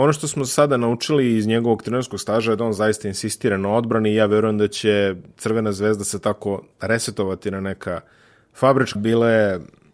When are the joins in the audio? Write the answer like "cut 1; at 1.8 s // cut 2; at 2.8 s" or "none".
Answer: cut 1; at 9.0 s